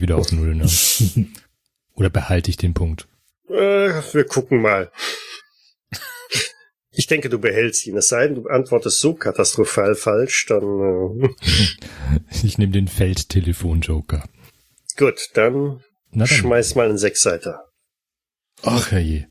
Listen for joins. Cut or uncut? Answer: uncut